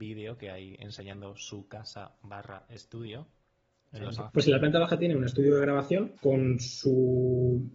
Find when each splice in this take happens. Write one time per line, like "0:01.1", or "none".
0:04.3
0:06.2